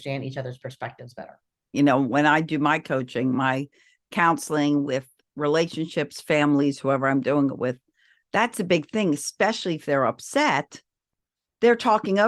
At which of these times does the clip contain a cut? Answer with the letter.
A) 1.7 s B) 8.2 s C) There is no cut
A